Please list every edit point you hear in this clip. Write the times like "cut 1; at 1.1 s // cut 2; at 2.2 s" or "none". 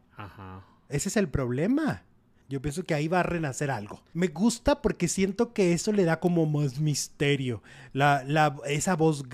cut 1; at 2.4 s // cut 2; at 4.1 s